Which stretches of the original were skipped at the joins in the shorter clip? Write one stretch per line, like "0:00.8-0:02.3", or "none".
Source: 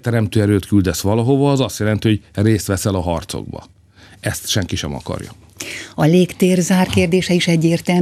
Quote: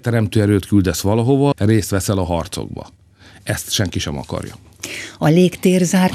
0:01.5-0:02.3